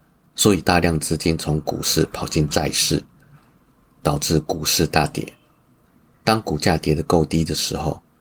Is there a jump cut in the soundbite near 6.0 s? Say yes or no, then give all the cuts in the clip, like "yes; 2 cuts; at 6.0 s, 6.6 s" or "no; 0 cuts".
no; 0 cuts